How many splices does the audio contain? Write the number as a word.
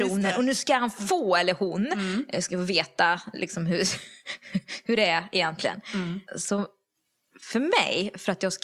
one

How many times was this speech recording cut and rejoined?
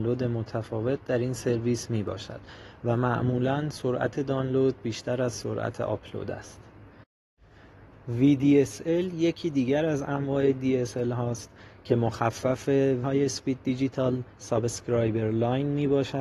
one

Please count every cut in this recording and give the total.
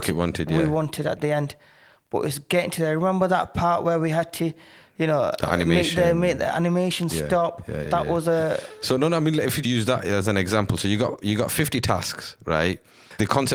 two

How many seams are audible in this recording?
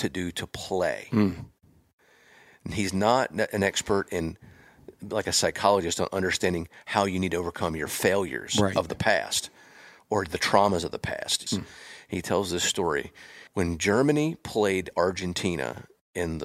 two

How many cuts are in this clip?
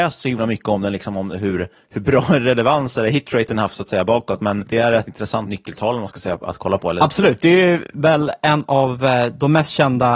zero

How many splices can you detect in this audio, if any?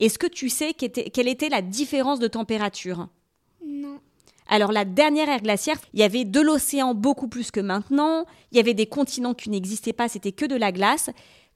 one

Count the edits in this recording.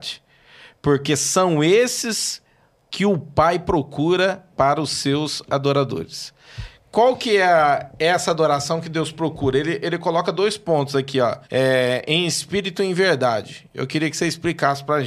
one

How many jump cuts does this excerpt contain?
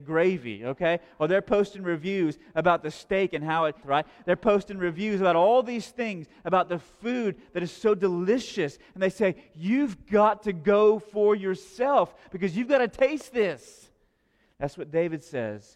one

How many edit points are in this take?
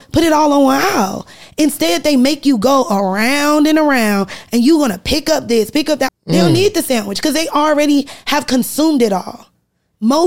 one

